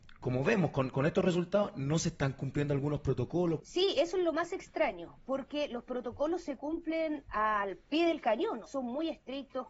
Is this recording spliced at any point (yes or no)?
yes